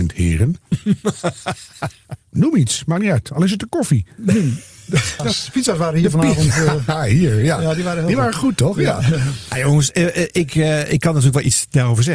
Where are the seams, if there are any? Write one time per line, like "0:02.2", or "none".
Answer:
0:05.2